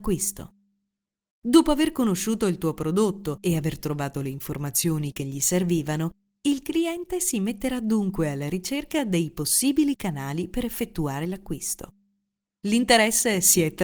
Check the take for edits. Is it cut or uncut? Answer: uncut